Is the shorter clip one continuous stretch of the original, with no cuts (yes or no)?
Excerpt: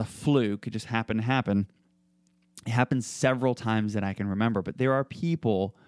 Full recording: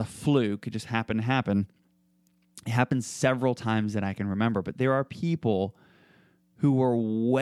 yes